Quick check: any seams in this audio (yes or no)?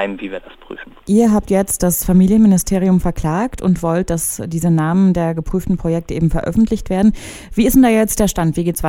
no